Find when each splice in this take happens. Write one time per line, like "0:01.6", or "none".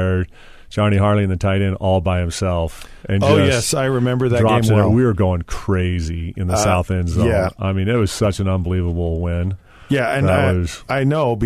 none